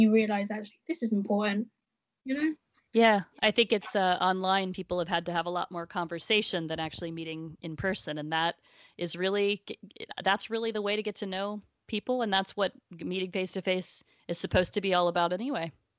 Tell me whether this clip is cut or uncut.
uncut